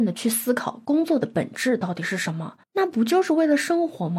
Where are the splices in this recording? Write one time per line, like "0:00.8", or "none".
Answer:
0:02.6